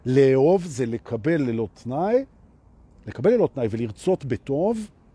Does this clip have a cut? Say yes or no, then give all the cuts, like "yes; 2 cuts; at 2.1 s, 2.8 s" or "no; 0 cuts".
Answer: no; 0 cuts